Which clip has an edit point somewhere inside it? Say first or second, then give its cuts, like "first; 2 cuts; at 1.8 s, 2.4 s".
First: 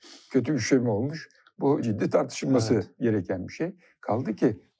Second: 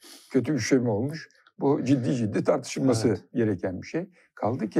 first; 1 cut; at 1.8 s